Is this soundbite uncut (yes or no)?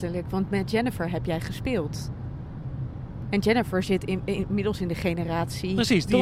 yes